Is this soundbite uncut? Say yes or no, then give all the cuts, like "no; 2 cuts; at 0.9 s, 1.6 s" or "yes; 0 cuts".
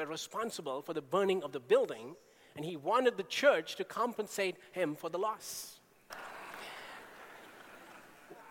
no; 1 cut; at 6.1 s